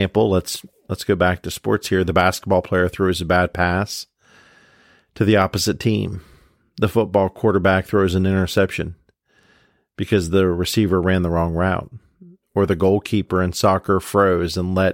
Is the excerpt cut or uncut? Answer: uncut